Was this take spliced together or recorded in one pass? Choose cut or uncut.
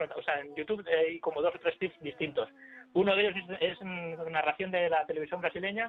uncut